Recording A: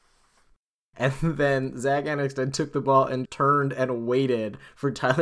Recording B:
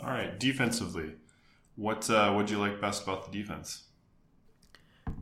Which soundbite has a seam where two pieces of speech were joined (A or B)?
A